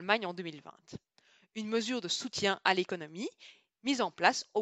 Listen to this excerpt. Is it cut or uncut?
uncut